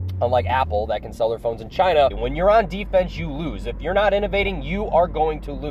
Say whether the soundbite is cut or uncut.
cut